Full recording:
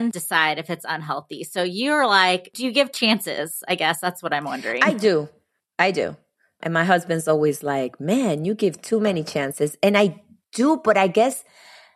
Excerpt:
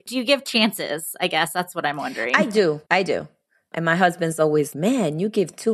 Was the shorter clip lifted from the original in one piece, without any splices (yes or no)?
no